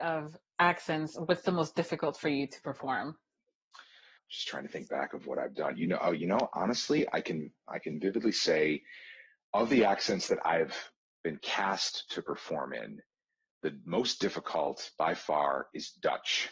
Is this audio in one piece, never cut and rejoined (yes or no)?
no